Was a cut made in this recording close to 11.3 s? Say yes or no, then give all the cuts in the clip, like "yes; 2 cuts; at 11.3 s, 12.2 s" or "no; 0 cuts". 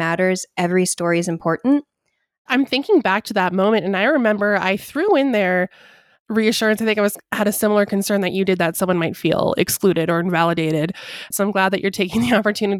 yes; 1 cut; at 11.3 s